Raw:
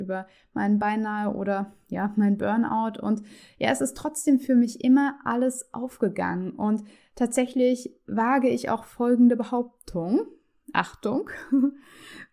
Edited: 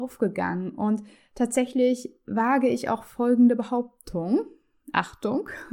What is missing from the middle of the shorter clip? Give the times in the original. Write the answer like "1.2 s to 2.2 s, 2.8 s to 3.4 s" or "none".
none

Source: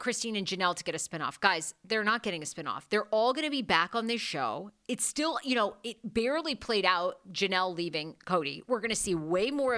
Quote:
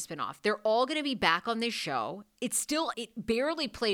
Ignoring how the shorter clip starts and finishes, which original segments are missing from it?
5.4 s to 5.8 s

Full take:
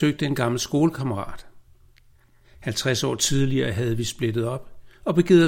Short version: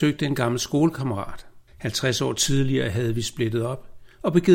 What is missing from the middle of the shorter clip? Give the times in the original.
1.7 s to 2.5 s

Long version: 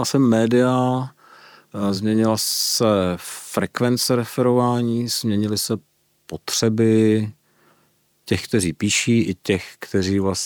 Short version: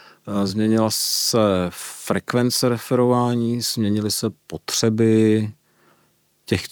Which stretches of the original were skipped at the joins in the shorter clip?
5.9 s to 6.2 s

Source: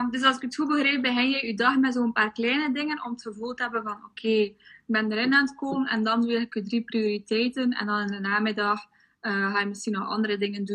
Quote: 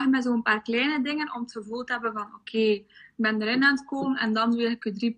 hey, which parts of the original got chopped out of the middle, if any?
none

